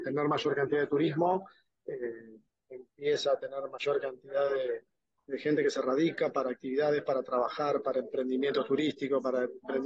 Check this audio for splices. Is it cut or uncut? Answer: uncut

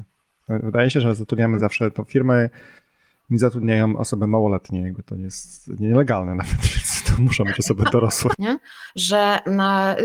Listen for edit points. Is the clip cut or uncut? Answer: cut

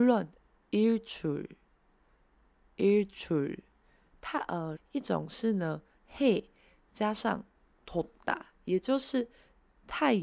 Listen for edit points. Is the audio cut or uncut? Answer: cut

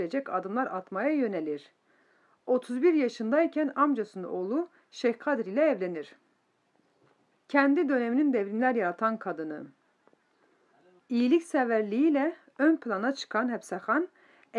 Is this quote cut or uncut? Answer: cut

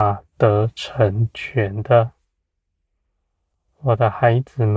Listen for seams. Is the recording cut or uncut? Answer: uncut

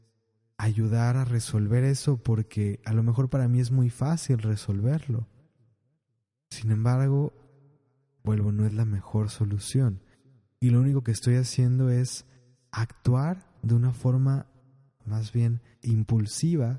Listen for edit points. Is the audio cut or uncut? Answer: cut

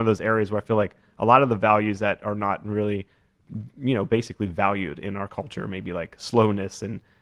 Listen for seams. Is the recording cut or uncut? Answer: uncut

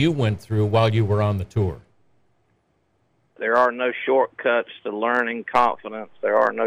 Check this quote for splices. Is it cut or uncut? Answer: cut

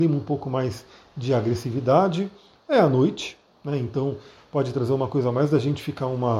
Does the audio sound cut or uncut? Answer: uncut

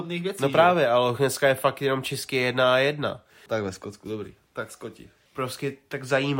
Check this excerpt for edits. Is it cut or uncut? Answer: cut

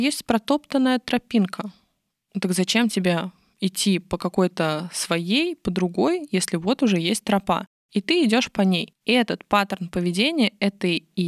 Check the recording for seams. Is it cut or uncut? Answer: uncut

